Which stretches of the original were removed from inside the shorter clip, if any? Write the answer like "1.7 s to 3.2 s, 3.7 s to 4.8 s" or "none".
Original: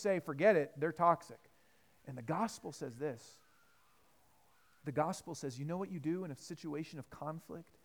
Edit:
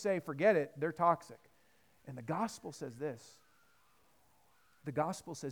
none